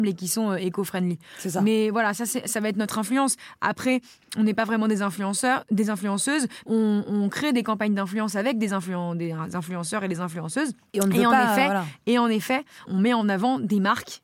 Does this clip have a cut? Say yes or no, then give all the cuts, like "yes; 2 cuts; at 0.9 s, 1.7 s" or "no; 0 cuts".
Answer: yes; 2 cuts; at 6.7 s, 12.9 s